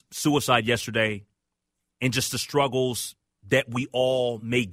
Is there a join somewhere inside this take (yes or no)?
no